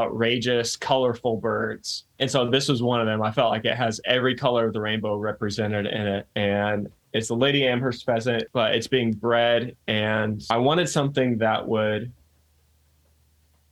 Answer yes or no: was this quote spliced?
yes